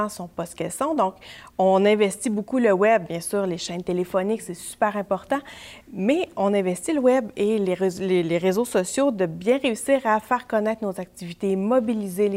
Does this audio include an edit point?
no; 0 cuts

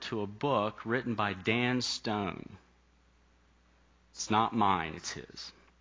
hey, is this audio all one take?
yes; 0 cuts

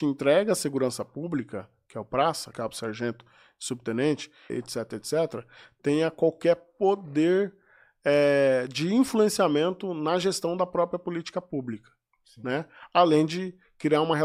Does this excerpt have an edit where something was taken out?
yes; 2 cuts; at 2.5 s, 4.5 s

